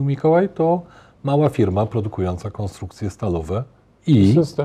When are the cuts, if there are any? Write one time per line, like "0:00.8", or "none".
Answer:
none